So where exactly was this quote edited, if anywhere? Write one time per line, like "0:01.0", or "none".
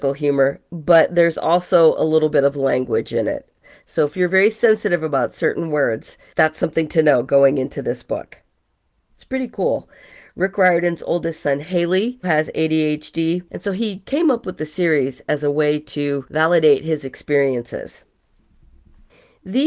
0:09.1
0:12.2